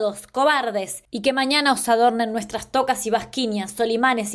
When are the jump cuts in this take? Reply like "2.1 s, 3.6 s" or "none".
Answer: none